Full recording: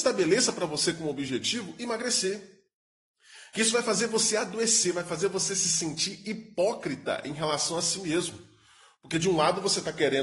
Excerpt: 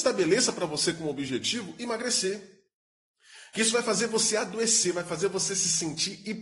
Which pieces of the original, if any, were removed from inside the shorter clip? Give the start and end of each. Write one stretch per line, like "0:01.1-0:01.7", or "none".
none